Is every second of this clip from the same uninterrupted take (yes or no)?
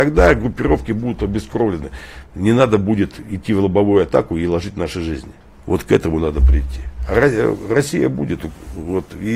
no